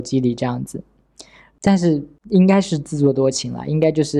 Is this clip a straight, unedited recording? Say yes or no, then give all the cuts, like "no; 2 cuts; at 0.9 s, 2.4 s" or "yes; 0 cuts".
no; 1 cut; at 1.5 s